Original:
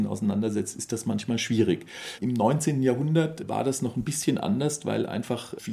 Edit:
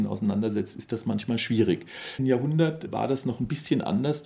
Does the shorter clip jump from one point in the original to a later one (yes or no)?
yes